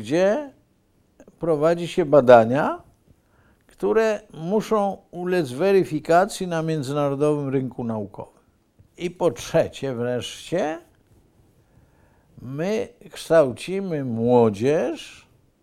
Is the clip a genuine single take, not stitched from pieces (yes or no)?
yes